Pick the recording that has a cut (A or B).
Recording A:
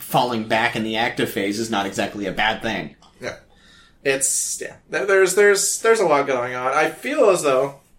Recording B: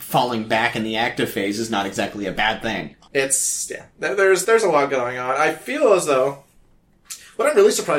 B